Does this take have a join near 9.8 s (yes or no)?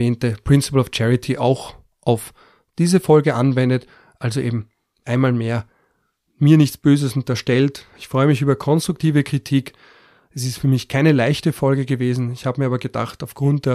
no